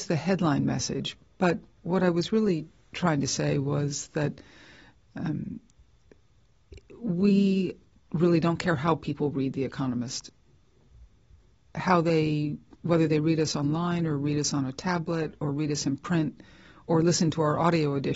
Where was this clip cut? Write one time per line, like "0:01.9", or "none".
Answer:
none